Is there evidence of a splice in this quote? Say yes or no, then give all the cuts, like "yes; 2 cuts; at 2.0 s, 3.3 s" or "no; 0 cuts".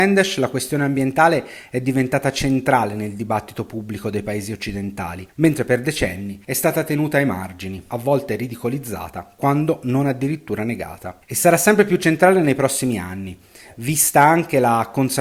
no; 0 cuts